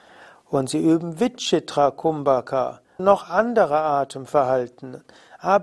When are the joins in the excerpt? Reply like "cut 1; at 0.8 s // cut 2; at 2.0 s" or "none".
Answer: cut 1; at 3.0 s